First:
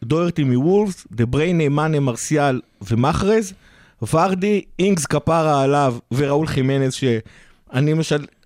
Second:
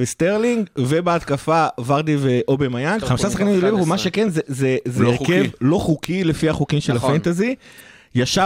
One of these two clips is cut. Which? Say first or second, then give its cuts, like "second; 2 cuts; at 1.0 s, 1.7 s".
second; 1 cut; at 3.0 s